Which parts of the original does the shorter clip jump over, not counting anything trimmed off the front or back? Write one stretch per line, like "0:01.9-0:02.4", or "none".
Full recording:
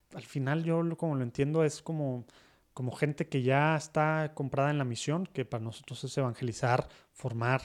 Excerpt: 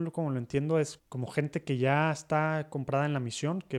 0:01.8-0:02.6